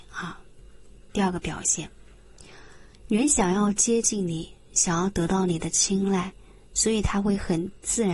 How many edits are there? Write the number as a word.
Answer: zero